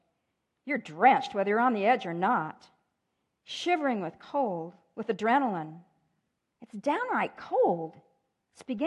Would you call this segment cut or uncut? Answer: cut